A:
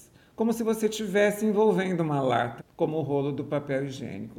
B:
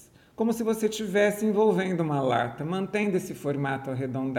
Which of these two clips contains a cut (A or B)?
A